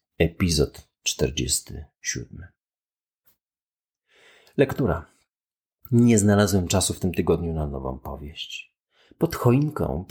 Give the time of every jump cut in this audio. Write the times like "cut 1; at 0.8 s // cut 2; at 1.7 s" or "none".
none